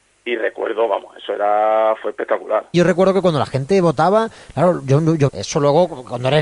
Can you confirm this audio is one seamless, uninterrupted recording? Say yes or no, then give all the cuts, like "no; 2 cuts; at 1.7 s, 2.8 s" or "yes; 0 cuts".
no; 2 cuts; at 2.7 s, 5.3 s